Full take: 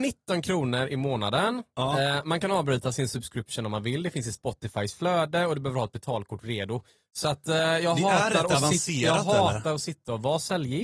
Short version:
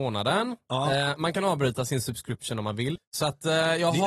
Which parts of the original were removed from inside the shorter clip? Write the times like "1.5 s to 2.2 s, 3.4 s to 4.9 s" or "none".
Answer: 4.0 s to 7.0 s

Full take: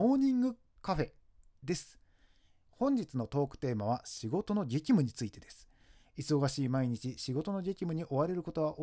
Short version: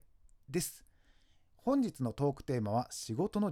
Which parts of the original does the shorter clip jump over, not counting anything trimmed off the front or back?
none

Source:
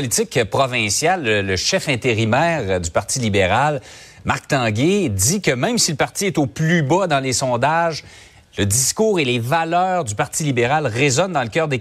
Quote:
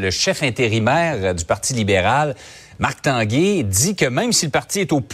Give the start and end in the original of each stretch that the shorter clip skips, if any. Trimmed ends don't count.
none

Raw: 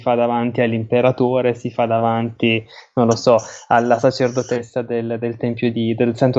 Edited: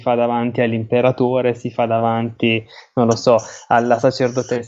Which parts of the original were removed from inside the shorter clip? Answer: none

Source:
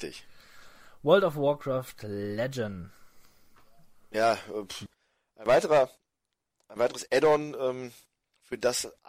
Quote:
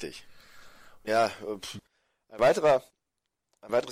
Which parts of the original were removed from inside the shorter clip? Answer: 1.0 s to 4.1 s

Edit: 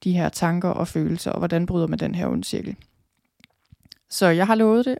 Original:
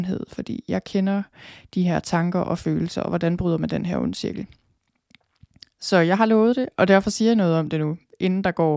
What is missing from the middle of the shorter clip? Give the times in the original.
none

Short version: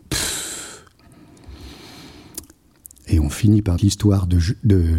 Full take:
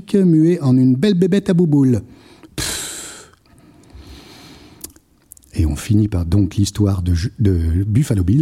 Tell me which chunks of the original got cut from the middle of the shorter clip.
6.2 s to 6.5 s

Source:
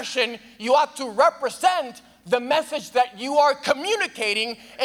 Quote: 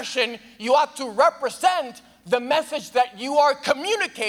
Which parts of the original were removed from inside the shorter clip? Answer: none

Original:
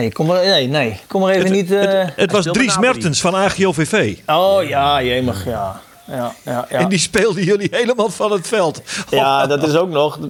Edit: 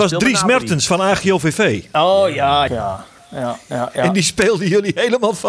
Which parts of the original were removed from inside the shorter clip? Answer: 5.0 s to 5.4 s

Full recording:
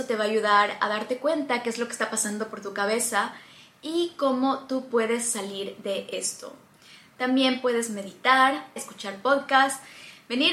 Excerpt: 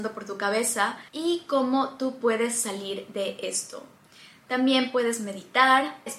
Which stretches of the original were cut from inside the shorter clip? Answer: 3.4 s to 3.8 s

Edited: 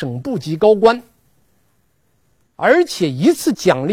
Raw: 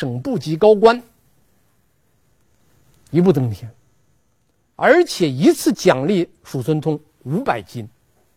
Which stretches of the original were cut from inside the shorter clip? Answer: 2.5 s to 4.7 s

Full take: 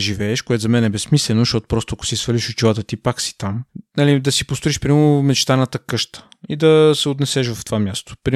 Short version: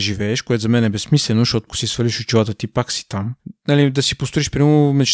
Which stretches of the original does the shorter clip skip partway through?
1.7 s to 2.0 s

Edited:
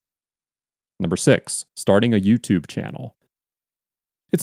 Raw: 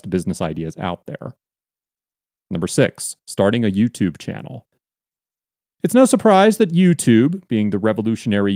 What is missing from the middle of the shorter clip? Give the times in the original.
none

